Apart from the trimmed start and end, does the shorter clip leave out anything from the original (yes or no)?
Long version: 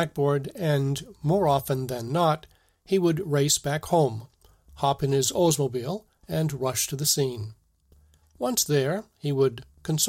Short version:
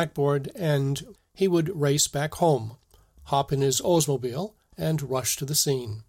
yes